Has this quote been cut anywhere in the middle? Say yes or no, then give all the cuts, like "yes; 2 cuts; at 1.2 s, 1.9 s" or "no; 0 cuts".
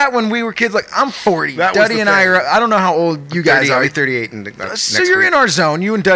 no; 0 cuts